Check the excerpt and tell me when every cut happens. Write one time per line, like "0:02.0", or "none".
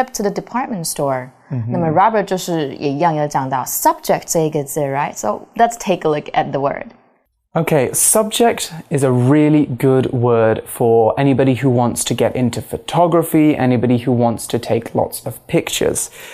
0:07.9